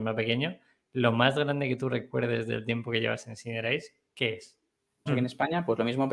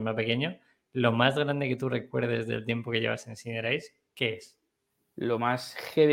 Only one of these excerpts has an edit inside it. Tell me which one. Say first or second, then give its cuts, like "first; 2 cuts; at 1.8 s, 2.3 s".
first; 1 cut; at 5.1 s